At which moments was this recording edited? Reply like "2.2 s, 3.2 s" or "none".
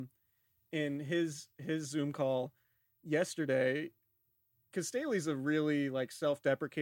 none